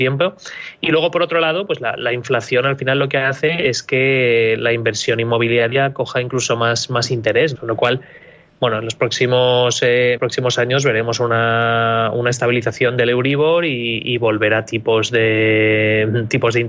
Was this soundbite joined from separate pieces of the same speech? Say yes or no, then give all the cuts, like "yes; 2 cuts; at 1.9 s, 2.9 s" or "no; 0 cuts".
yes; 2 cuts; at 7.6 s, 10.2 s